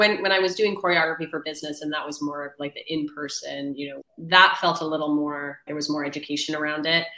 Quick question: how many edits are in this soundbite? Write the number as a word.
two